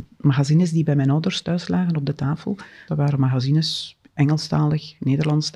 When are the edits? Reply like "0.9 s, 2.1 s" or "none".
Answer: 2.9 s